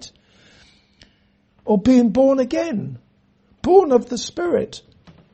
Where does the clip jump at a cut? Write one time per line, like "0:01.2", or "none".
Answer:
0:01.5